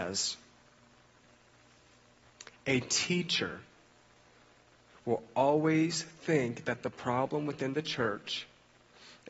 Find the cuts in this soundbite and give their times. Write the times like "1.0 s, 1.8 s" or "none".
none